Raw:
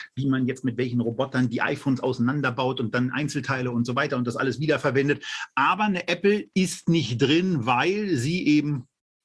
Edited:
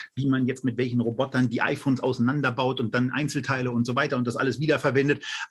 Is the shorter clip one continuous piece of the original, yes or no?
yes